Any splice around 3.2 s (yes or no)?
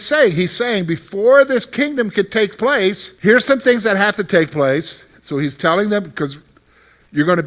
yes